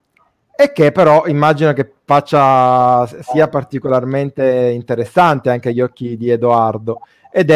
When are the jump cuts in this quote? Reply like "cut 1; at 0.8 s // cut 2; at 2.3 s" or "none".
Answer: none